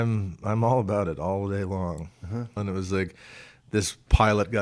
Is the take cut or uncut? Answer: cut